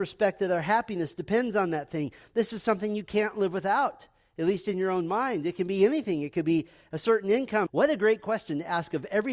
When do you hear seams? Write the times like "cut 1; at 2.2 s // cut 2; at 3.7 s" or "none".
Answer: cut 1; at 7.7 s